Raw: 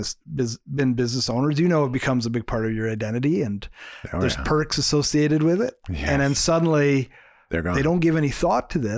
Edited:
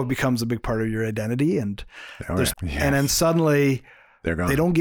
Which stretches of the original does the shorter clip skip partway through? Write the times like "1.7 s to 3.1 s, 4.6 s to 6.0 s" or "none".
4.4 s to 5.8 s

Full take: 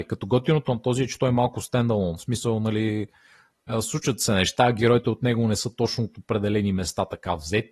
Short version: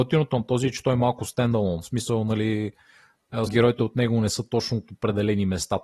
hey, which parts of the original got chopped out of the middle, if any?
3.8 s to 4.7 s

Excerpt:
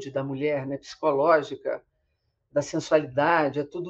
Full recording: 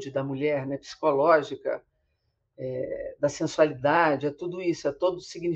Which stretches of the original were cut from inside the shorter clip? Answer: 2.5 s to 3.2 s

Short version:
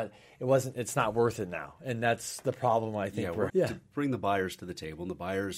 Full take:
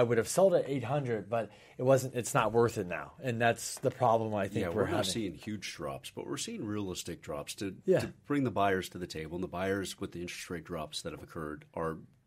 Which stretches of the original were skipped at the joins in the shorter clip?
4.9 s to 7.8 s

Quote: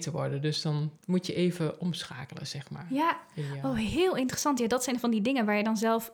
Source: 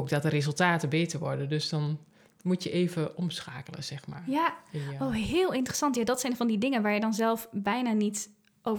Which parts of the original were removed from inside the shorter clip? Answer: 2.0 s to 2.3 s

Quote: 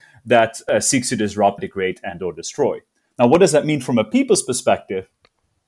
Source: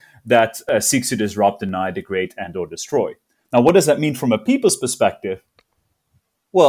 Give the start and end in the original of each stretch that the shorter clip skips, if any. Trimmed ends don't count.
1.6 s to 1.9 s

